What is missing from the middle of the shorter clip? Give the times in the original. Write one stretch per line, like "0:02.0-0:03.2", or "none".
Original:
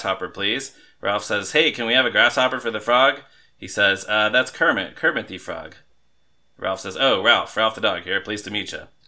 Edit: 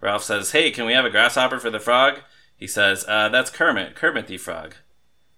none